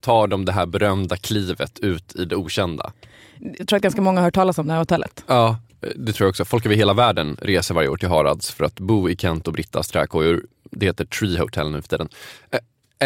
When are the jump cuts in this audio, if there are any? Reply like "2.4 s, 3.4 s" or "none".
3.6 s